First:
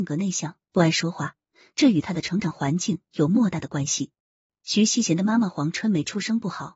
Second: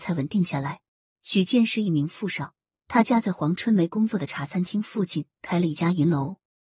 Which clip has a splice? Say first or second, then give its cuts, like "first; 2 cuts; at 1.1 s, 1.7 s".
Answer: second; 1 cut; at 1.1 s